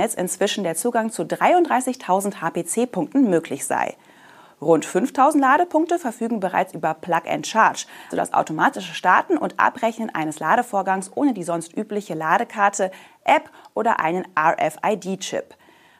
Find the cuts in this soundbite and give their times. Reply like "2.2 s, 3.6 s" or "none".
8.1 s